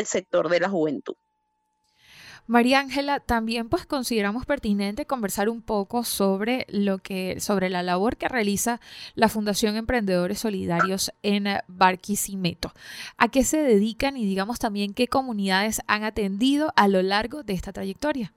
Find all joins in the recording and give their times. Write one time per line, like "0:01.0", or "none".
none